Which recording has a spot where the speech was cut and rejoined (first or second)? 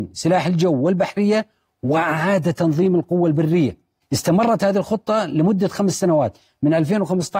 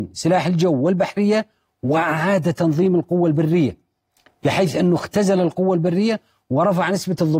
first